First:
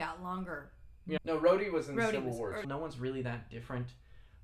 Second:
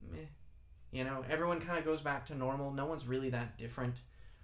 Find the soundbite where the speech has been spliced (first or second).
first